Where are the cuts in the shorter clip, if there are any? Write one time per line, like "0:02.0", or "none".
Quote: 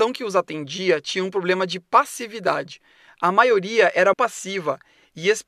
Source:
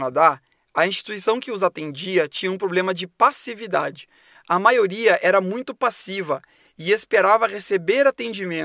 0:04.1